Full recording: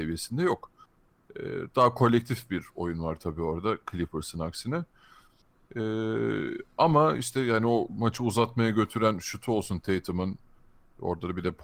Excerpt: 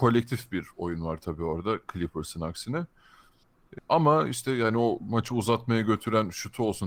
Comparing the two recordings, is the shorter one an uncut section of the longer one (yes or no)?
no